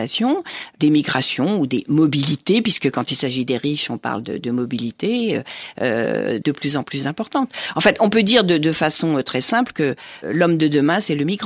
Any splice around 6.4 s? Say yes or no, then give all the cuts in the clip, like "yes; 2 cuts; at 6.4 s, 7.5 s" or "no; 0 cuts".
yes; 1 cut; at 6.4 s